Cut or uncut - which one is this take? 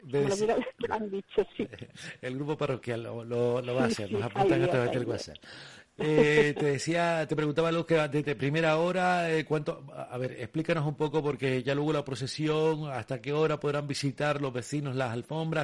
uncut